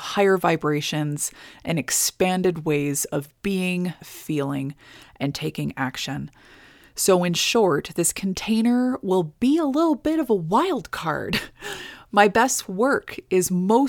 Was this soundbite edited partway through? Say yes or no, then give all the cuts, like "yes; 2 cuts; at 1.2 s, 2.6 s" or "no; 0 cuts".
yes; 1 cut; at 4.0 s